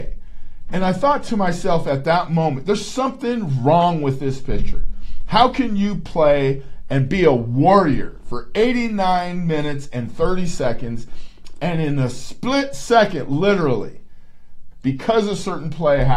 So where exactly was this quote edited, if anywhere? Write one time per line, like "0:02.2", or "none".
0:14.7